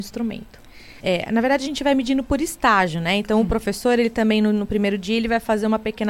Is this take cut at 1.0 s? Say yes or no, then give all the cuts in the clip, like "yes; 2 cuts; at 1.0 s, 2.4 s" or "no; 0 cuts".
yes; 1 cut; at 1.0 s